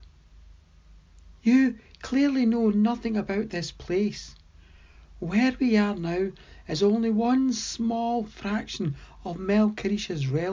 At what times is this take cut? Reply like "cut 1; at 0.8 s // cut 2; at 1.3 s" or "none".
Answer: cut 1; at 1.3 s

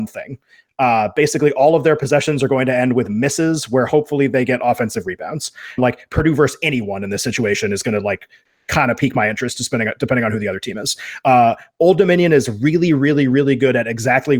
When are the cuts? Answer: cut 1; at 5.8 s

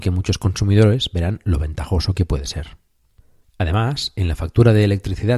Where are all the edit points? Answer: cut 1; at 3.4 s

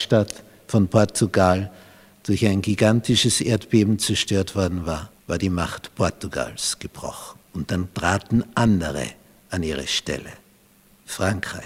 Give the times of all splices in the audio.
cut 1; at 5.2 s // cut 2; at 7.5 s

